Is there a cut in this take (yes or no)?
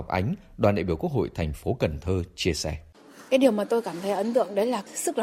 no